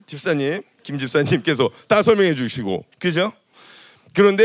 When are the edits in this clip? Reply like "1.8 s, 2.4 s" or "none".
2.9 s